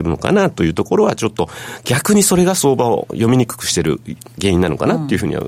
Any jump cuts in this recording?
no; 0 cuts

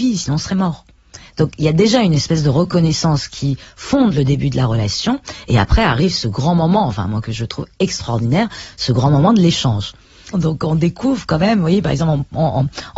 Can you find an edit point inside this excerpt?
yes; 1 cut; at 10.3 s

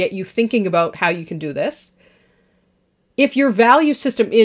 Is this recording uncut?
yes; 0 cuts

